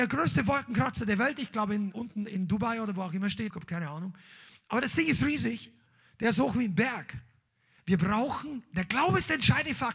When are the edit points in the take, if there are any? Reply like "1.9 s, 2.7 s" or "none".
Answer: 1.9 s, 3.5 s, 7.8 s